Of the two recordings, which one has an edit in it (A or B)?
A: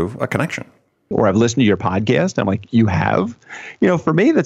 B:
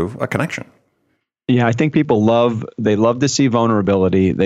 A